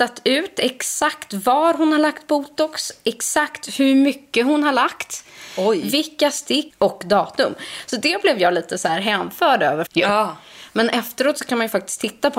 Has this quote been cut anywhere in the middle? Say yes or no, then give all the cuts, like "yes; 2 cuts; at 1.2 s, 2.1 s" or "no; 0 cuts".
yes; 2 cuts; at 6.7 s, 9.9 s